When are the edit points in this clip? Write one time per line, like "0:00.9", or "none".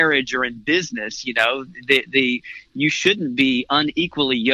none